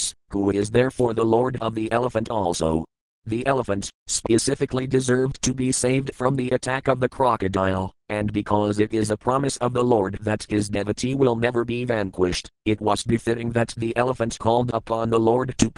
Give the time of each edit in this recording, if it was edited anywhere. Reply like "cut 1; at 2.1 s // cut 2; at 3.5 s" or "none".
cut 1; at 4.0 s // cut 2; at 13.0 s